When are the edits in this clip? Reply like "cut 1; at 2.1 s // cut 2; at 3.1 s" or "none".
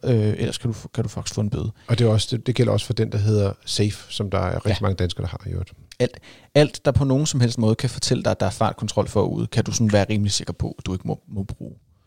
none